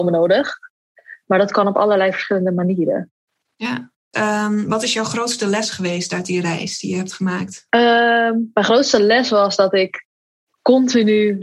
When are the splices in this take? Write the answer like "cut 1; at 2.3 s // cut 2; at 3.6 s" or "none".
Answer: cut 1; at 4.1 s // cut 2; at 7.7 s